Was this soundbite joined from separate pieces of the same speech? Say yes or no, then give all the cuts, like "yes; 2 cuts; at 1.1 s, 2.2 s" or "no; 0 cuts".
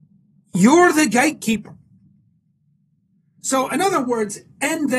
yes; 1 cut; at 3.4 s